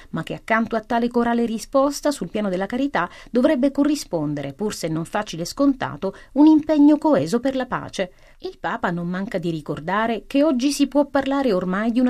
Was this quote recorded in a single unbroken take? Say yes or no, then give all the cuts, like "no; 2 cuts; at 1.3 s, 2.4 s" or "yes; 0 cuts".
no; 1 cut; at 8.3 s